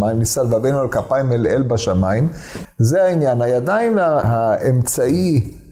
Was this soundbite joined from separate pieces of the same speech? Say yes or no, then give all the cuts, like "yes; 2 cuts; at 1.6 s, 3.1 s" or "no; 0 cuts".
yes; 2 cuts; at 2.6 s, 4.2 s